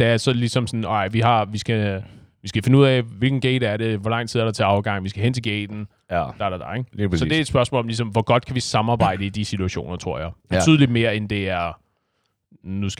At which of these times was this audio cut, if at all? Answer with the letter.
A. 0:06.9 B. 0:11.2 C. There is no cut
C